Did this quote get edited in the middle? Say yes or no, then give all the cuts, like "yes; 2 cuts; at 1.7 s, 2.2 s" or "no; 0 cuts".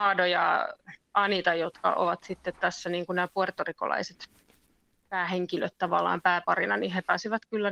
no; 0 cuts